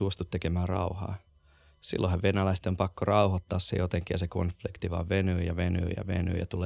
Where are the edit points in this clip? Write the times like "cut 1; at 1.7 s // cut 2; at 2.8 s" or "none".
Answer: none